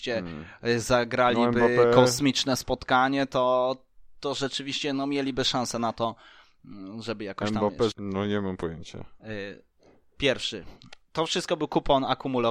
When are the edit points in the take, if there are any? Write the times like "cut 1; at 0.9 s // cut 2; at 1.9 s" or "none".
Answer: cut 1; at 7.9 s